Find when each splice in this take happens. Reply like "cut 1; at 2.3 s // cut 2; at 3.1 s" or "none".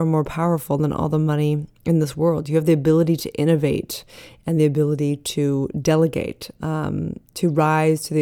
cut 1; at 6.6 s